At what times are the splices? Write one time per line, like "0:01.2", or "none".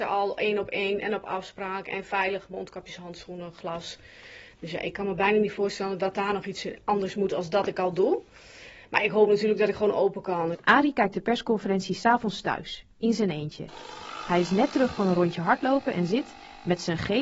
0:10.5